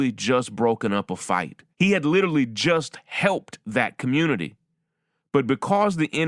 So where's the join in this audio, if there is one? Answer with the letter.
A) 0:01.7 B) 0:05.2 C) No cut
A